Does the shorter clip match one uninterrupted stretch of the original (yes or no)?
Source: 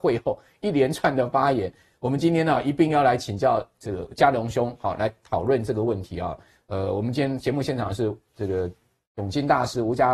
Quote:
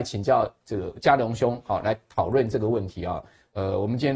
yes